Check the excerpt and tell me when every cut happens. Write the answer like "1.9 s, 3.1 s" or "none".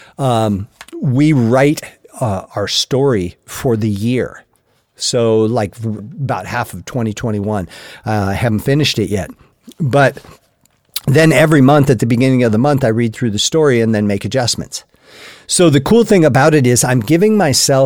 6.0 s

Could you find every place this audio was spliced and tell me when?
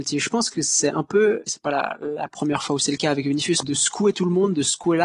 1.5 s, 3.6 s

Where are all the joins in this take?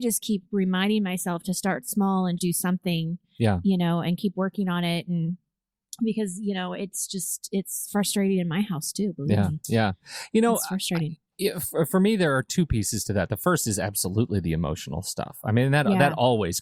2.4 s

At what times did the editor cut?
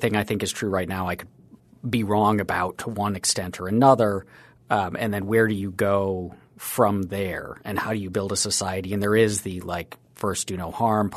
none

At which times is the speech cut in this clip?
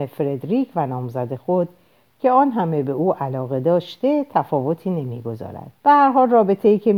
5.8 s

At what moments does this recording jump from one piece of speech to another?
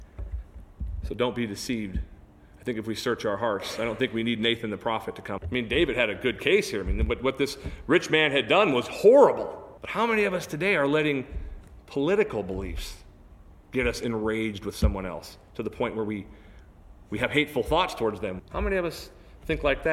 5.4 s, 9.8 s, 18.4 s

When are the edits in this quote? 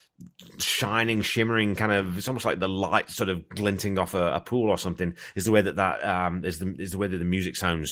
none

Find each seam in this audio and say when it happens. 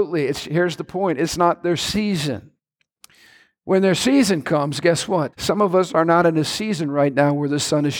5.3 s

